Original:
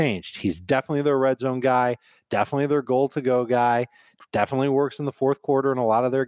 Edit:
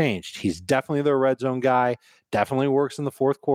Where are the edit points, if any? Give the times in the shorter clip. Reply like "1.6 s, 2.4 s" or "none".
2.3 s